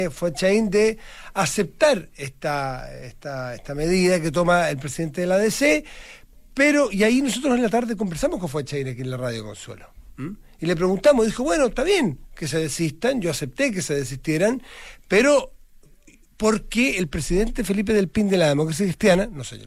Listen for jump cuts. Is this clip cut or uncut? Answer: uncut